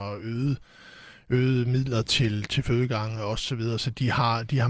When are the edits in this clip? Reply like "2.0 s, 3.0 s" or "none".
none